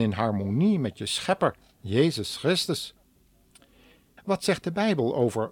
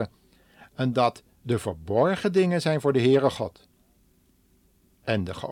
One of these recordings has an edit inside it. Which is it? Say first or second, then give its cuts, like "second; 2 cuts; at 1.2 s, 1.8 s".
first; 1 cut; at 4.2 s